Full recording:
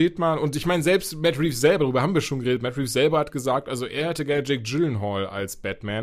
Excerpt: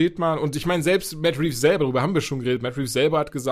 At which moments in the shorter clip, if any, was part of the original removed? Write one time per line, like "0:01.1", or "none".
none

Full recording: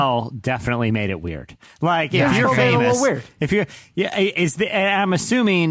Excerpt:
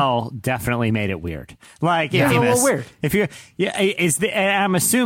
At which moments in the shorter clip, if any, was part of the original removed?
0:02.3

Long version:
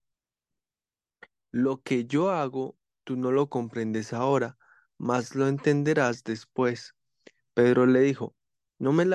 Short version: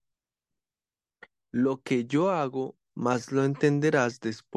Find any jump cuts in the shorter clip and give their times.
0:02.9

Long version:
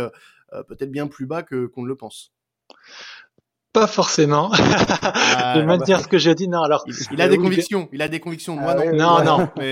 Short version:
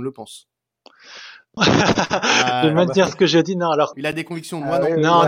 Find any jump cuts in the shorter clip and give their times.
0:01.6
0:03.9

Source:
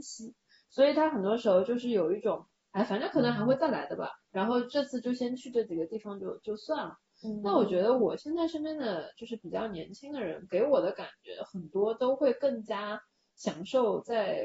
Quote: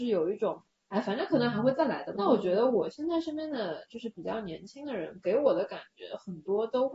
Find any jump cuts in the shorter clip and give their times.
0:02.1

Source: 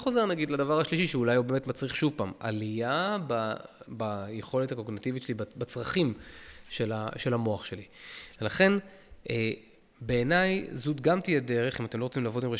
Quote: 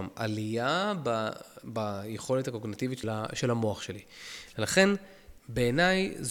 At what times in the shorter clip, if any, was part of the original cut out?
0:03.0
0:05.4

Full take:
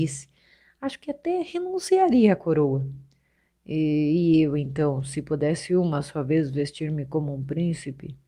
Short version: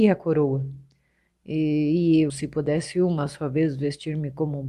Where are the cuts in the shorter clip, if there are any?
0:02.3

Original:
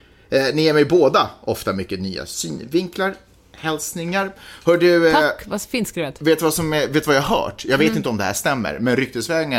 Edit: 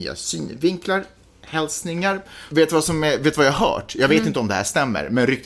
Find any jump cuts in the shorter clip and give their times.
0:02.5

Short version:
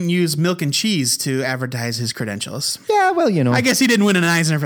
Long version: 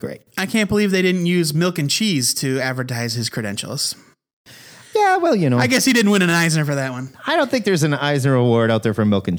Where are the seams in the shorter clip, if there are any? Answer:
0:02.8

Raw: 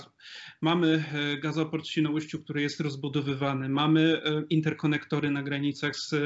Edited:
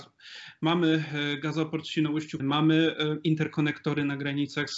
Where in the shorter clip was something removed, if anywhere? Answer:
0:02.4

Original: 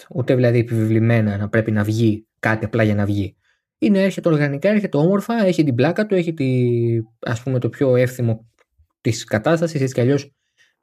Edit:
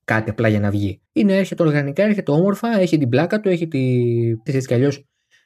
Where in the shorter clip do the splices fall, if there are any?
0:01.1
0:04.5

